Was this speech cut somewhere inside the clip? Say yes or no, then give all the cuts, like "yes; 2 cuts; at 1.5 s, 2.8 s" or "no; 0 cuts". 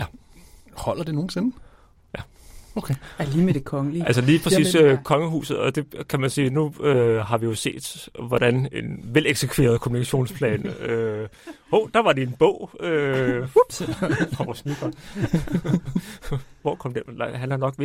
yes; 1 cut; at 8.7 s